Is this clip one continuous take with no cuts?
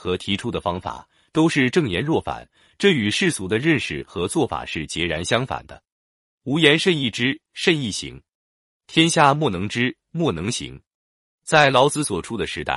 yes; 0 cuts

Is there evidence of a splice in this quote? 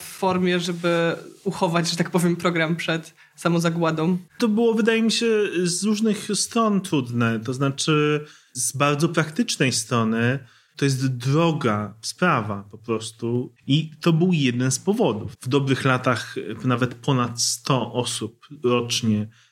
yes; 3 cuts; at 4.3 s, 13.6 s, 15.4 s

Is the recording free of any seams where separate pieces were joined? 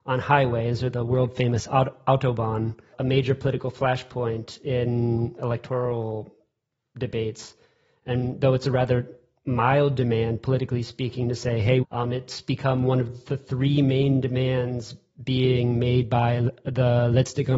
no; 2 cuts; at 2.9 s, 11.8 s

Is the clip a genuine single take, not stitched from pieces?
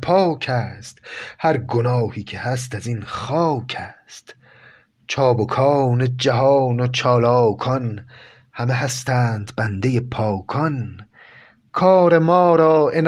yes; 0 cuts

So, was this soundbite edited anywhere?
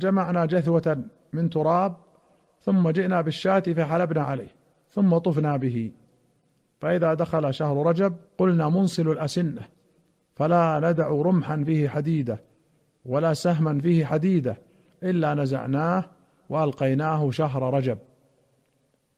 yes; 1 cut; at 8.3 s

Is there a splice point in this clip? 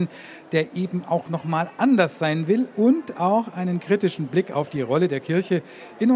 no; 0 cuts

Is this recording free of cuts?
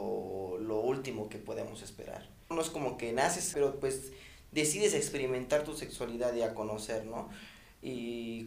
no; 2 cuts; at 2.5 s, 3.5 s

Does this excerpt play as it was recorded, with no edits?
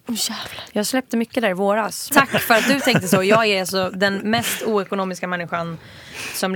no; 1 cut; at 2.1 s

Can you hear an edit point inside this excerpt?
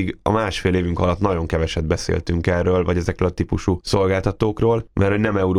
no; 0 cuts

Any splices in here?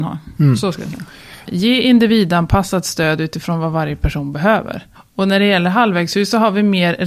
yes; 2 cuts; at 1.5 s, 4.9 s

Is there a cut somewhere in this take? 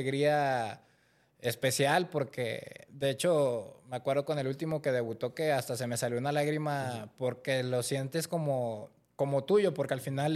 no; 0 cuts

